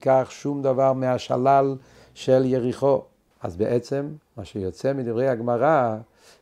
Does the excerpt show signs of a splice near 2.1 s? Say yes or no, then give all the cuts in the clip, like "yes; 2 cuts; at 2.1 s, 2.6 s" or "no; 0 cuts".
no; 1 cut; at 3.3 s